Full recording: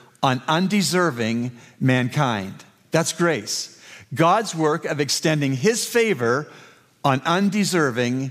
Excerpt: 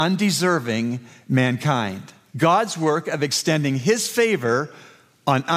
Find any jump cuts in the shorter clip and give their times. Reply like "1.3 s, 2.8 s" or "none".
2.3 s